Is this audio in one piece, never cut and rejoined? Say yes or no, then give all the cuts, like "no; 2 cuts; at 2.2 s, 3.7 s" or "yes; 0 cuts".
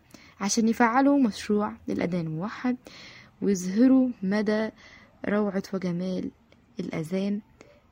yes; 0 cuts